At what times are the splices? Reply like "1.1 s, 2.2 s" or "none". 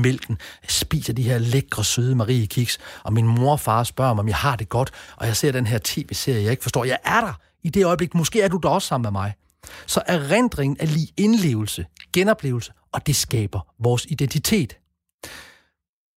none